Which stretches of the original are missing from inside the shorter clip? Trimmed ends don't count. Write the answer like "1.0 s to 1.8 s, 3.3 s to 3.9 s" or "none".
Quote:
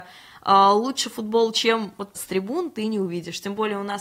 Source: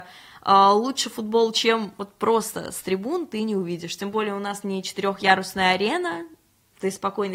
2.2 s to 2.7 s